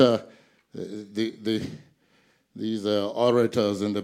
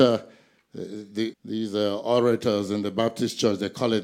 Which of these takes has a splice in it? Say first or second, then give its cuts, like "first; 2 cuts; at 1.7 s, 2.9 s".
second; 1 cut; at 1.3 s